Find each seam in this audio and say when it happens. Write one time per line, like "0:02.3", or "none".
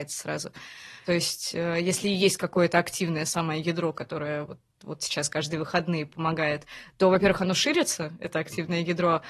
0:01.0